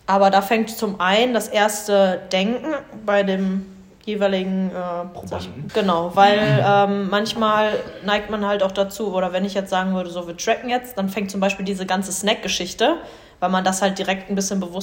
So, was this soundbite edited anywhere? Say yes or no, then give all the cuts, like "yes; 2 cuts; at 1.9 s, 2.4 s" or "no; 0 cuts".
yes; 1 cut; at 5.7 s